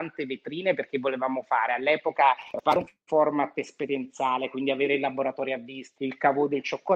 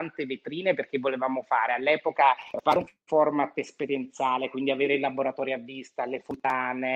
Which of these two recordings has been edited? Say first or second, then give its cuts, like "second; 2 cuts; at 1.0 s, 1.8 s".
first; 1 cut; at 6.0 s